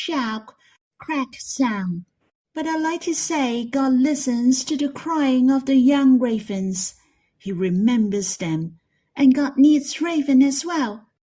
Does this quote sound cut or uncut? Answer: uncut